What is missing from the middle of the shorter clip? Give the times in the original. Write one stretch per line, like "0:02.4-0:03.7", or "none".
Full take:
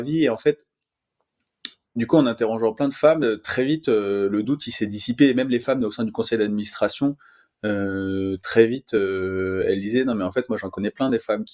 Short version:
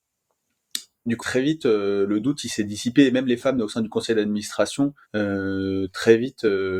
0:02.1-0:03.4
0:07.3-0:07.5